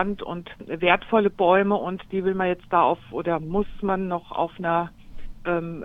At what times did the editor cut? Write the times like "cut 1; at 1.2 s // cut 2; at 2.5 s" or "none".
none